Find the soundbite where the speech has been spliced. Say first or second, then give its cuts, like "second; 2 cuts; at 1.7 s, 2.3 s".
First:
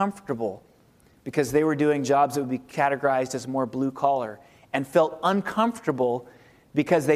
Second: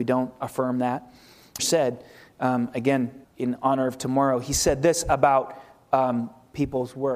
second; 2 cuts; at 1.6 s, 3.2 s